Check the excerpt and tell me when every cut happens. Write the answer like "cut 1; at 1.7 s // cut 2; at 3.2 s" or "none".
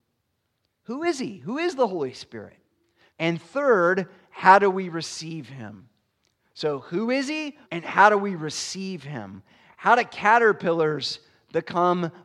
cut 1; at 3.1 s // cut 2; at 7.6 s